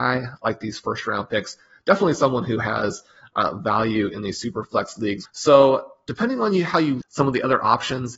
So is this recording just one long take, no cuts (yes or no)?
no